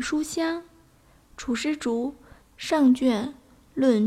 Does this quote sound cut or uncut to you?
cut